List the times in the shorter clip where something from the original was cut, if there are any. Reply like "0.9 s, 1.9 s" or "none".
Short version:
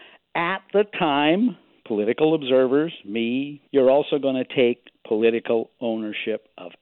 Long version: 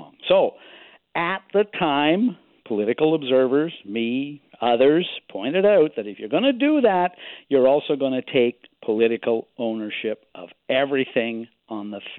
3.7 s